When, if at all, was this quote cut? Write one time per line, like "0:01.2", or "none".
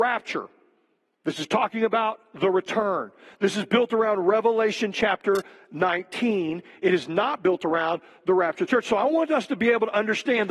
none